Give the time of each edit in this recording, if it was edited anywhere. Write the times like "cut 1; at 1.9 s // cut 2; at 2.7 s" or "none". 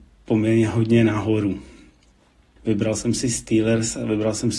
cut 1; at 2.6 s